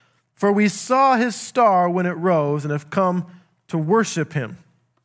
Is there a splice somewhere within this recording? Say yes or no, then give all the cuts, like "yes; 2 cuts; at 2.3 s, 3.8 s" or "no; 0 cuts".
no; 0 cuts